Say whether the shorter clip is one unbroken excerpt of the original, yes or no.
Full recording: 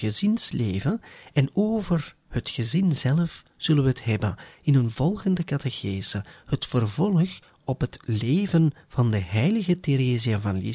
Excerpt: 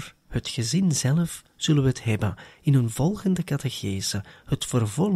yes